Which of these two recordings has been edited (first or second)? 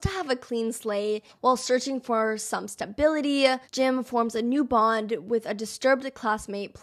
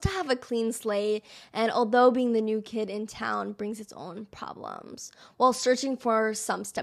first